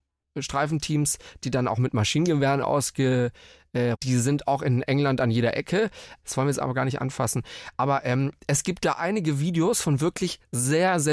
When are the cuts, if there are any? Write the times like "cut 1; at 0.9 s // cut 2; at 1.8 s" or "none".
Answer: cut 1; at 3.9 s // cut 2; at 6.2 s

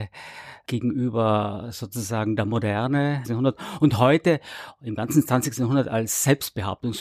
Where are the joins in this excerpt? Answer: cut 1; at 3.2 s

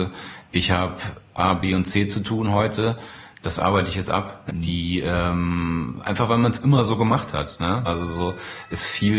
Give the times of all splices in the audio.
cut 1; at 4.5 s // cut 2; at 7.9 s

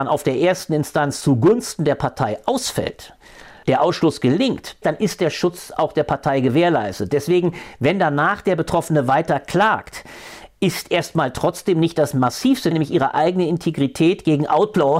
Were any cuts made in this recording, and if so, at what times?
cut 1; at 3.6 s // cut 2; at 4.8 s // cut 3; at 12.7 s

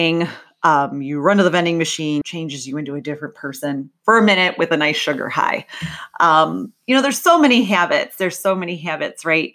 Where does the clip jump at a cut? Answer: cut 1; at 2.2 s

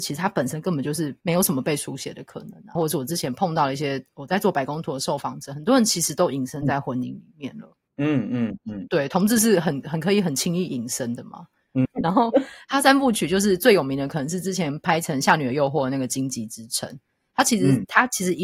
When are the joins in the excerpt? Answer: cut 1; at 2.7 s // cut 2; at 11.8 s

